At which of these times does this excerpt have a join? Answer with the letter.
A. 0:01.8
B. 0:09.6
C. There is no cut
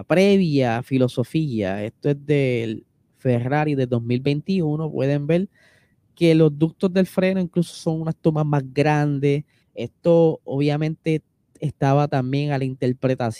B